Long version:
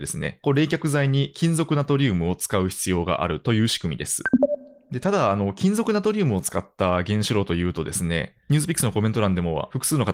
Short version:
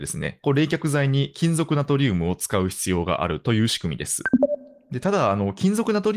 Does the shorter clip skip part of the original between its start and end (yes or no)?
no